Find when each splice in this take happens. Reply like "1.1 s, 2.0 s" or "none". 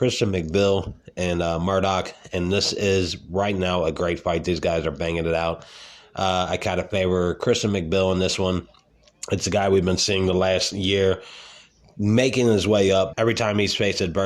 13.1 s